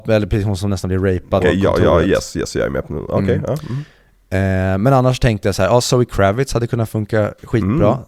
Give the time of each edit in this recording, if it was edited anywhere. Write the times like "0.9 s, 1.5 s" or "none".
1.4 s